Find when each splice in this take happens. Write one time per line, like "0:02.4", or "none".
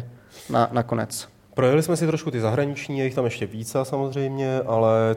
none